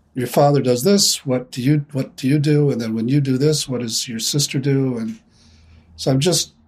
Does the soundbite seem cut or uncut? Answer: uncut